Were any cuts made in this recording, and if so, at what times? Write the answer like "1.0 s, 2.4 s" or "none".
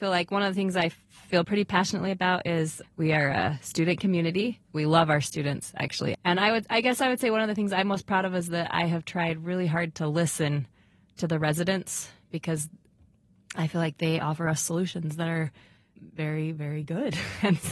6.1 s